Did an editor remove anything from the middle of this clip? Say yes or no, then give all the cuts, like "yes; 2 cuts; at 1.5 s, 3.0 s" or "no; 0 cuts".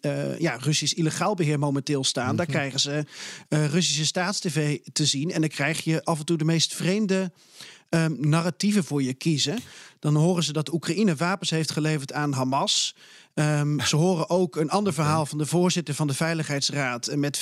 no; 0 cuts